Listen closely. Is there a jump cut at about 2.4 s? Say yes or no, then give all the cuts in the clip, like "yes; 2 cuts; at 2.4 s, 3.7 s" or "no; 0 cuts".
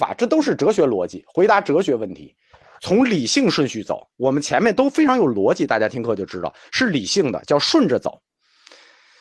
no; 0 cuts